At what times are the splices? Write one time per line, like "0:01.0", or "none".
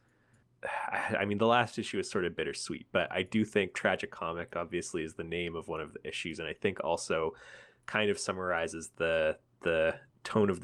0:03.7